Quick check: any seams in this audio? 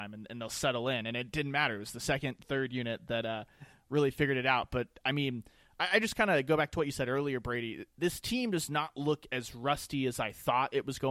no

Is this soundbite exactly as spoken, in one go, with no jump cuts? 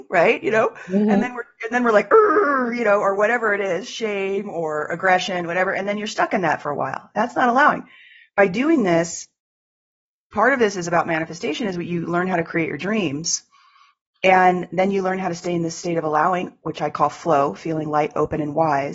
yes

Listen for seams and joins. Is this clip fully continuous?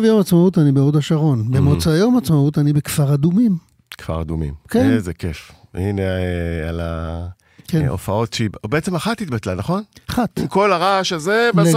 yes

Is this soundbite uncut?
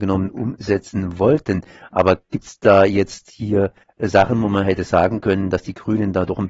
yes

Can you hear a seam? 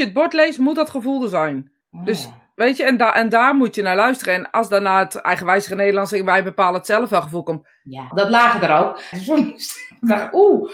yes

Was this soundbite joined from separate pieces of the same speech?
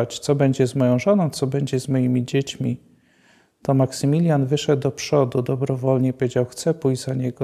no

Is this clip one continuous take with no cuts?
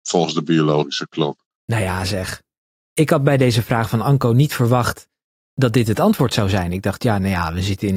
yes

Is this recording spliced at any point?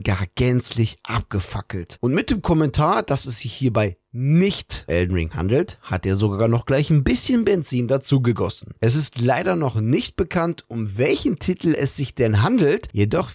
yes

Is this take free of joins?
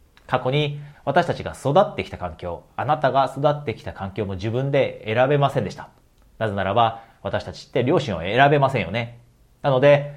no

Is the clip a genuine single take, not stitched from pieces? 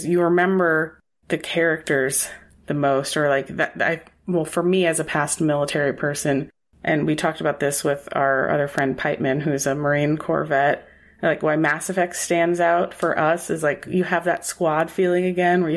yes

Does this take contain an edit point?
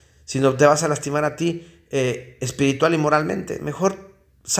no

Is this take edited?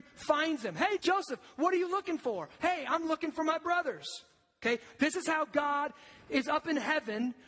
yes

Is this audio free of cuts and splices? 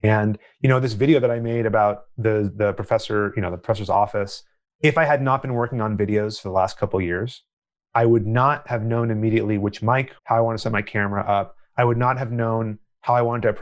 no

